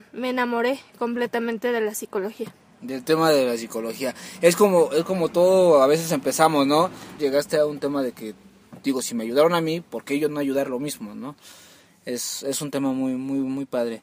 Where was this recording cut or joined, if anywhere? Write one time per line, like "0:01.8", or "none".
0:07.2